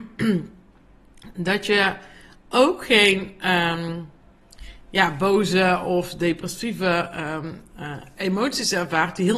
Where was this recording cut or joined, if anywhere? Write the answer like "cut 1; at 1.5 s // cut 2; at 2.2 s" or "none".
none

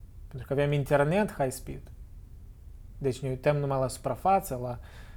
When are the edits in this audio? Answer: cut 1; at 2.9 s

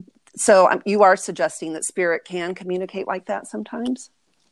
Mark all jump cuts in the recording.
none

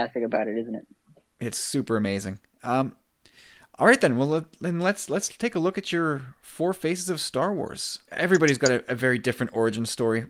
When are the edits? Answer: cut 1; at 8.1 s

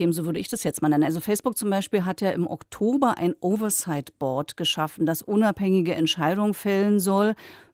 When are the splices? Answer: none

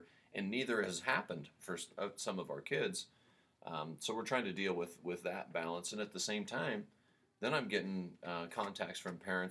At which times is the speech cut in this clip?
none

